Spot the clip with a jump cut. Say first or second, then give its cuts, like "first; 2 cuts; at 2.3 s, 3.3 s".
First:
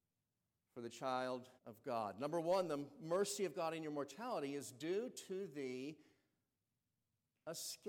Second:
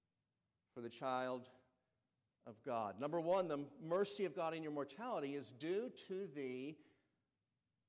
first; 1 cut; at 1.6 s